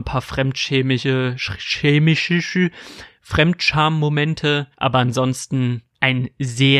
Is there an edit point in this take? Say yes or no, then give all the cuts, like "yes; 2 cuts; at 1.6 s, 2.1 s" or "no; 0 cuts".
no; 0 cuts